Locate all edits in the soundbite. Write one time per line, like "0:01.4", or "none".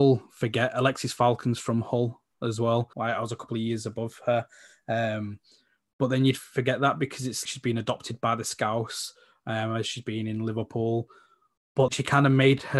0:02.9
0:07.4
0:11.9